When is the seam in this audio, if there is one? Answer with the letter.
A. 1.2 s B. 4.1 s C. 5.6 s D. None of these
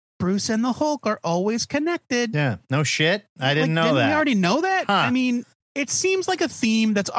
C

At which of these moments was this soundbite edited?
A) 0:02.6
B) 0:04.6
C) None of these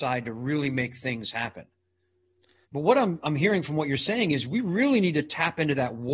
A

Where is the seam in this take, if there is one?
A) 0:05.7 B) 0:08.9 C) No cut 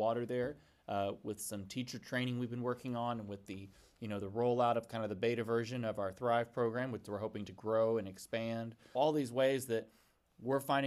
B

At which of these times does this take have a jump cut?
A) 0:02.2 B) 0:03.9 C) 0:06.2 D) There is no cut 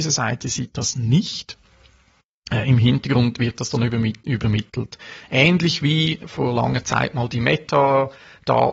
C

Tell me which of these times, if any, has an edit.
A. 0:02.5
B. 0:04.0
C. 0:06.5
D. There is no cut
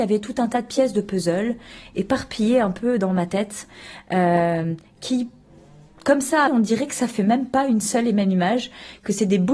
C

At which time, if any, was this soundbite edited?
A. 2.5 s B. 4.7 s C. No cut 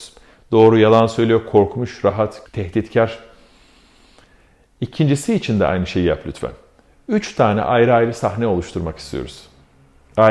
A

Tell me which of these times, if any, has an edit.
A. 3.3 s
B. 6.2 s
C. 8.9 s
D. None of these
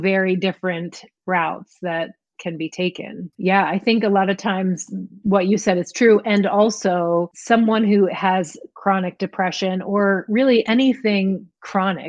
A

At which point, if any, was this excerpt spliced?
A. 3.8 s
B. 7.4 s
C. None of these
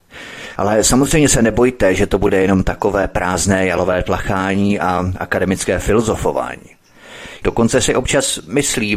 B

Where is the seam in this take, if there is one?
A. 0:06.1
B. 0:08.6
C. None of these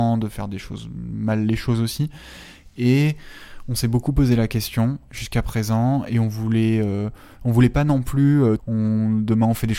B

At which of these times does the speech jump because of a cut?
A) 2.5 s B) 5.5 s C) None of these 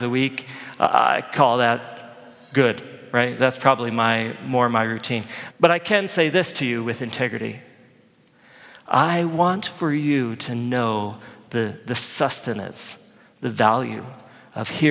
B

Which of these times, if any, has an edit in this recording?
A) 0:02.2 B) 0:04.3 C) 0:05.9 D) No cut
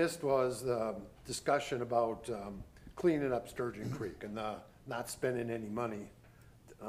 D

